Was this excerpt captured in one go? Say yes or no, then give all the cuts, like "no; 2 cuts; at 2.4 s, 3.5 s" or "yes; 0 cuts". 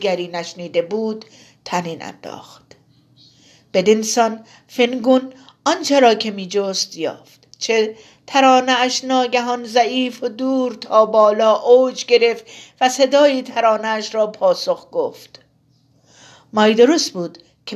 yes; 0 cuts